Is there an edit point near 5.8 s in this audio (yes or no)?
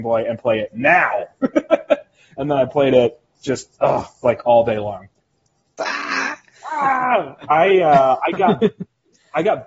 yes